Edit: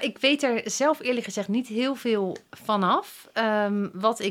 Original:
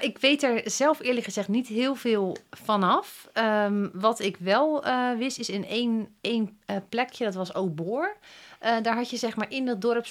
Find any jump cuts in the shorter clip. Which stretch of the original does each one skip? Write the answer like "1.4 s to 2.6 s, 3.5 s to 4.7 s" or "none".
none